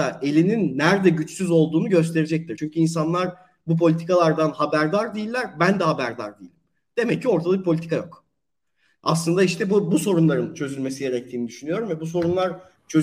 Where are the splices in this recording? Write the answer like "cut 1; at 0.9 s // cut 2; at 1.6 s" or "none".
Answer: none